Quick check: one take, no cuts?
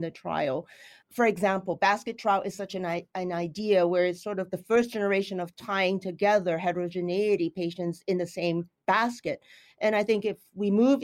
yes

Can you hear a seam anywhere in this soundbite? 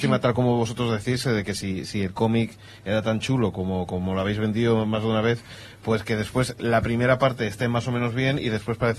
no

